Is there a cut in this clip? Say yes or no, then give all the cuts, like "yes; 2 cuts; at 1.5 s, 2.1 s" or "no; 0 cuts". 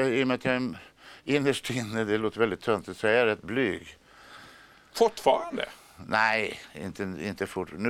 no; 0 cuts